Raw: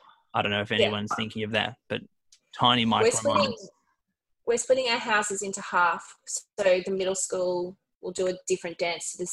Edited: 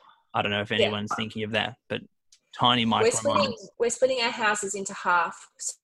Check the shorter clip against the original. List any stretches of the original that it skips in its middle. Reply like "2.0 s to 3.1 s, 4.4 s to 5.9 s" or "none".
3.7 s to 4.4 s

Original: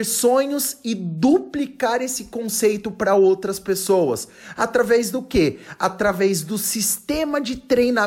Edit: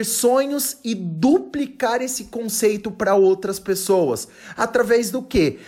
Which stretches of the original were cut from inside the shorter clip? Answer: none

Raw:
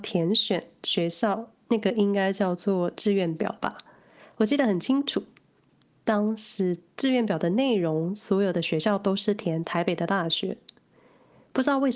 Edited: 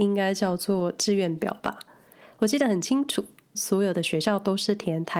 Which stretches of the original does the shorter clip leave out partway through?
5.5 s to 8.1 s

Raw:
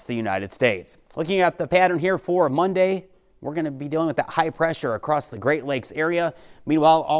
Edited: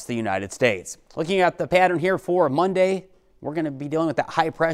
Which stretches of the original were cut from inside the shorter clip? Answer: none

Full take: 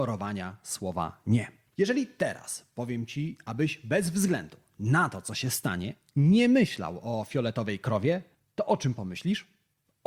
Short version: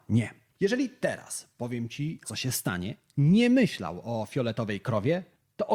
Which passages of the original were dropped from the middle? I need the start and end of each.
3.4 s to 5.2 s

